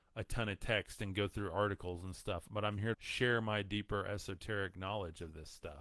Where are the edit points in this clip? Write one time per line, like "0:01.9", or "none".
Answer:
0:02.9